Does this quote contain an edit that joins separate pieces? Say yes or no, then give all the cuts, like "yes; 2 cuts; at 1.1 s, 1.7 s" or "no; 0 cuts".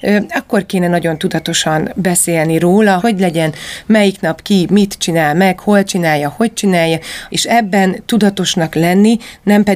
yes; 2 cuts; at 3.0 s, 7.3 s